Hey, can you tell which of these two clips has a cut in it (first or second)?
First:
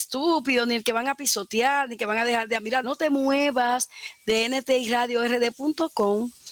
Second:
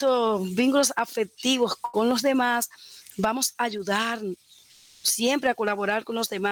first